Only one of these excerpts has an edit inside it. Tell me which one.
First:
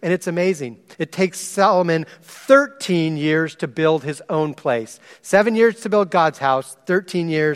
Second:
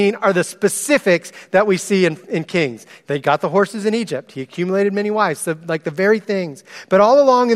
first; 1 cut; at 0.9 s

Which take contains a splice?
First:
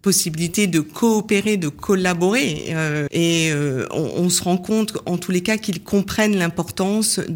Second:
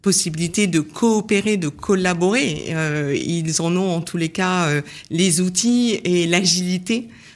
first; 1 cut; at 3.1 s

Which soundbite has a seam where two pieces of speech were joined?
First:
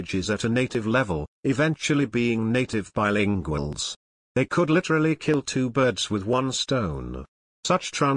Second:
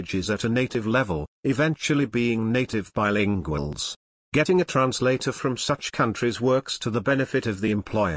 first; 1 cut; at 4.2 s

